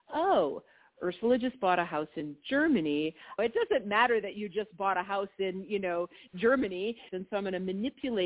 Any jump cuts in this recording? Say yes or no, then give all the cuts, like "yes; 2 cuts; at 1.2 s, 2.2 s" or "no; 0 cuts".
yes; 2 cuts; at 3.4 s, 7.1 s